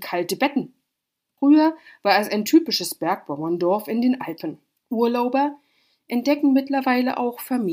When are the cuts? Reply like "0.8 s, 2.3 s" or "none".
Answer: 1.4 s, 4.8 s